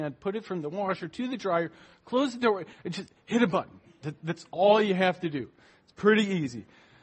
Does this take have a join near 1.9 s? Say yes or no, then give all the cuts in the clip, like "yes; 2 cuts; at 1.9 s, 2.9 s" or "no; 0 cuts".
no; 0 cuts